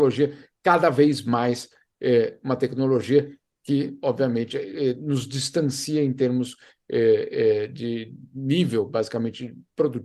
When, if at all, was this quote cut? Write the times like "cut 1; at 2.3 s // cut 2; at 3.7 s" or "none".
none